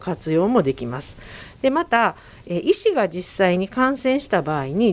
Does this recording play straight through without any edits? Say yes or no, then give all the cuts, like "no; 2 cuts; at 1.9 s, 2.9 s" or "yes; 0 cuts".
yes; 0 cuts